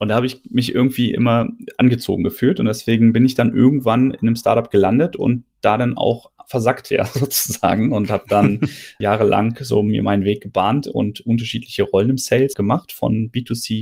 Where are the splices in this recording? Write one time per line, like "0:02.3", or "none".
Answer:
0:09.0
0:12.5